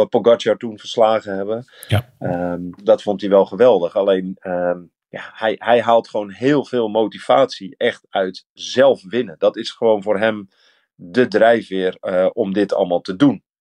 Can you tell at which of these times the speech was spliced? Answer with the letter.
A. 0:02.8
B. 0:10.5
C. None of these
A